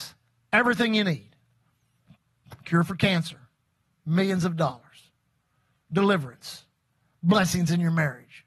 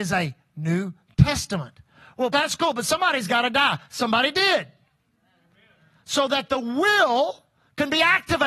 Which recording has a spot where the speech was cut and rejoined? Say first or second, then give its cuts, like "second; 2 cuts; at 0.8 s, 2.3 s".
second; 1 cut; at 2.3 s